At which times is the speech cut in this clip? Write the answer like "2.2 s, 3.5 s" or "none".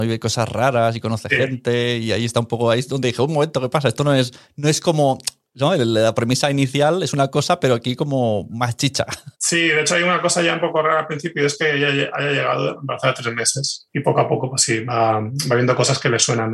9.3 s, 13.9 s